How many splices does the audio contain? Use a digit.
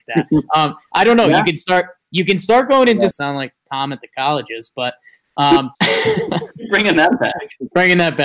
2